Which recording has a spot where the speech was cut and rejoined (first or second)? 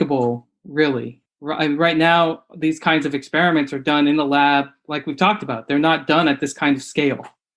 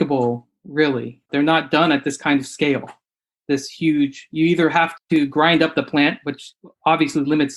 second